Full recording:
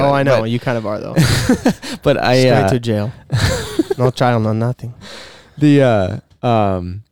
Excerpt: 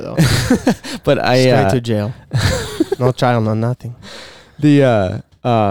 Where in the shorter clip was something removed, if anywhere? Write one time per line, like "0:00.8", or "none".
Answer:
none

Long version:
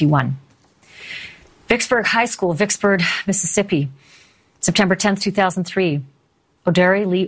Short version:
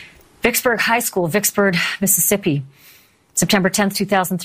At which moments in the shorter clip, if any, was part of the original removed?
none

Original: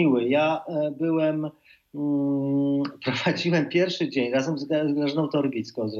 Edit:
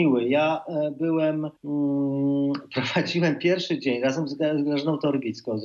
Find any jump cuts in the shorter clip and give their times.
0:01.6

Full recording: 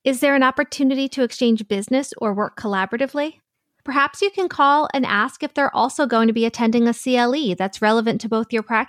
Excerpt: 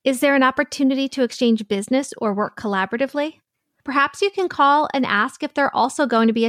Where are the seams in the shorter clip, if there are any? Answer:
none

